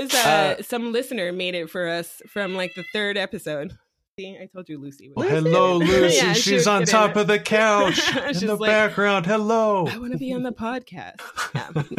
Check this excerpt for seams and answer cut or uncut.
uncut